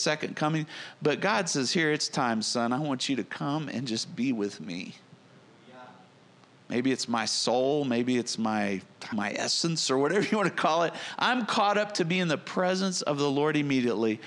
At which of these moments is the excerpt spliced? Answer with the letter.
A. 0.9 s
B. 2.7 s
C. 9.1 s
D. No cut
C